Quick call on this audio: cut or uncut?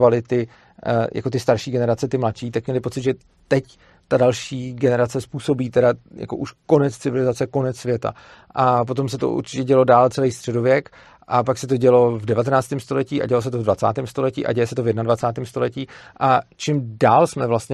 uncut